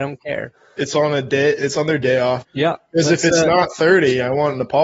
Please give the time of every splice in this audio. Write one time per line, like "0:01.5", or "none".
0:02.4